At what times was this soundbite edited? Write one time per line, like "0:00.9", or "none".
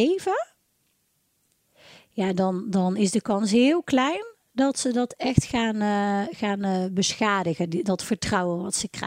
none